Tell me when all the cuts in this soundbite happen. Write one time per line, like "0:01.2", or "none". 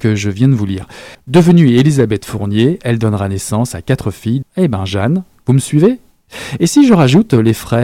0:01.1
0:04.4

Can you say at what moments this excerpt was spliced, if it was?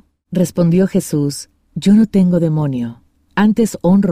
none

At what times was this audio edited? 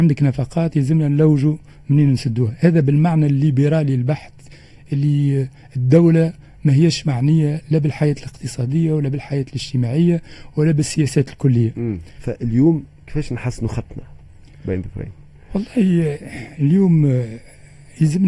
0:12.2

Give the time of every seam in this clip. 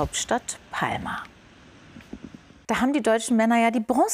0:02.6

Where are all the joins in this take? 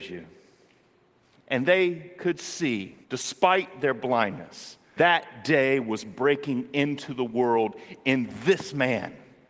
0:01.3
0:03.0
0:05.0

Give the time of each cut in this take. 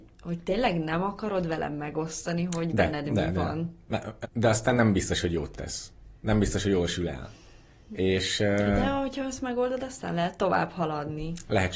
0:04.2

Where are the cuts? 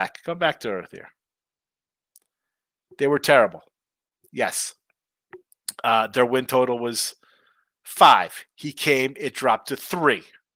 none

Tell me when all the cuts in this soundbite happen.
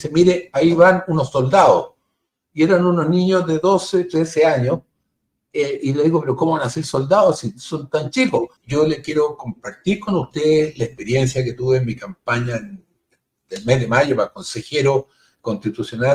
0:08.6

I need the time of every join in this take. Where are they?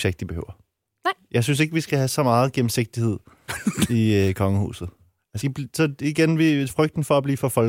0:05.4

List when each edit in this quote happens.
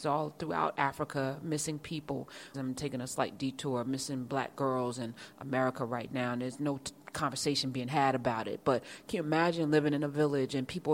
0:02.5

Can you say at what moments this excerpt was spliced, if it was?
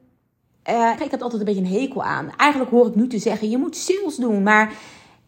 0:01.0

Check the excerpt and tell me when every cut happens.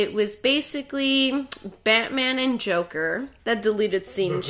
0:03.4

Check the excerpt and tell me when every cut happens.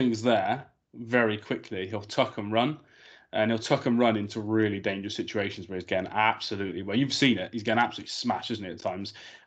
none

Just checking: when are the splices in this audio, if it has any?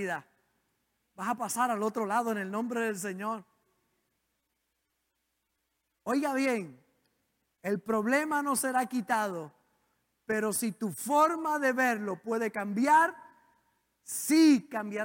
none

